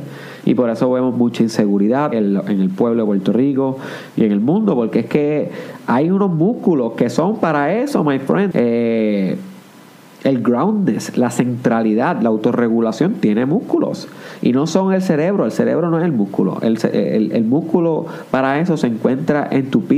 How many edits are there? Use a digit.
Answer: 2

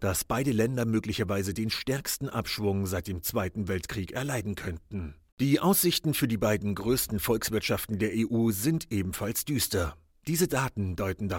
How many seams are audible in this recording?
2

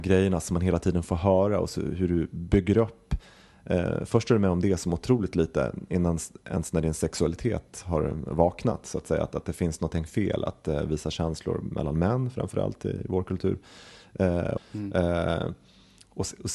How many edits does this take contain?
1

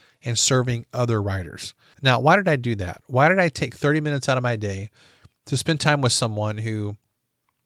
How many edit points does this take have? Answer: 1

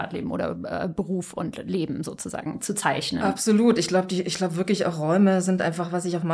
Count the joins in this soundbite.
0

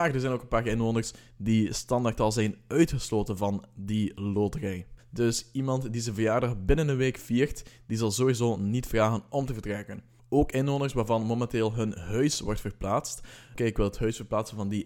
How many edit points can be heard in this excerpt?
2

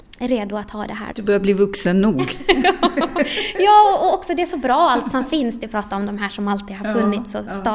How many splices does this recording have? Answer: 1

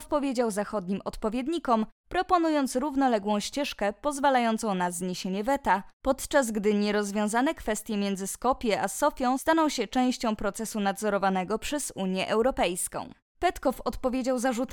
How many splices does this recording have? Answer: 1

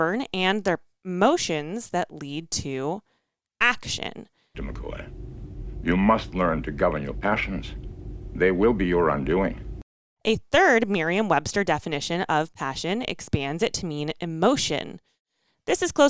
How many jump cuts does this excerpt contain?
1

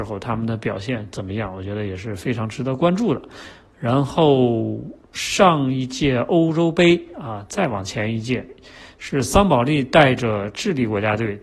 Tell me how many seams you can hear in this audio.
2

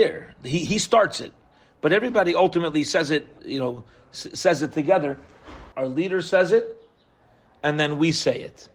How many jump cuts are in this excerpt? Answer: 2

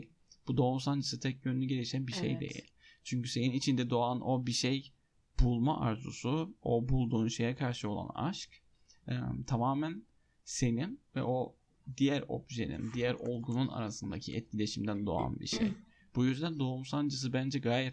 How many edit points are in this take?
0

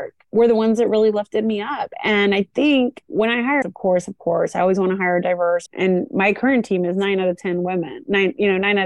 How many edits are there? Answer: 2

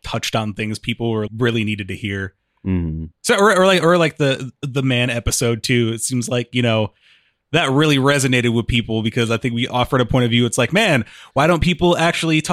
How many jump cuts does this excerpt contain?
1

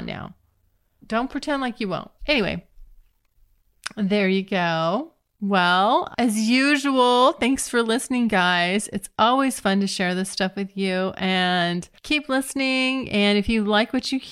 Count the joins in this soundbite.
3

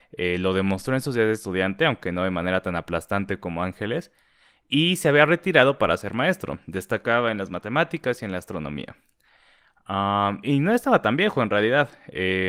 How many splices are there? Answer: 0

